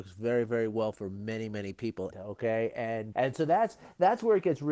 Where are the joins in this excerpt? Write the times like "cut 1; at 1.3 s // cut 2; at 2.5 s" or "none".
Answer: cut 1; at 2.1 s // cut 2; at 3.1 s